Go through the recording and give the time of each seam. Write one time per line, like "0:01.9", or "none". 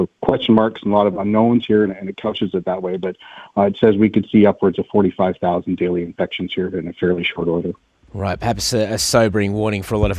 none